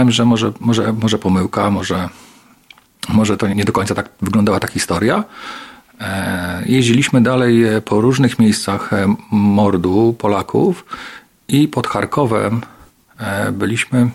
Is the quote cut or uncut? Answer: cut